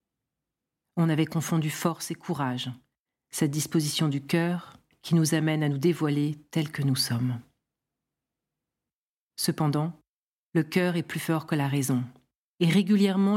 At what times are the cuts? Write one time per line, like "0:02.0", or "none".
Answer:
none